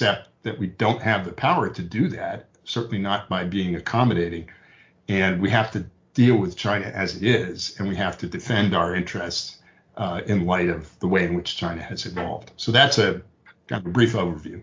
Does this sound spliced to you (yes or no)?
no